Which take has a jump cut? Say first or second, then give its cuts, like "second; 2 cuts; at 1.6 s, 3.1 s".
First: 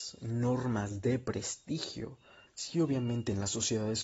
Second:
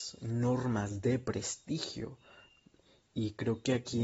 first; 1 cut; at 2.5 s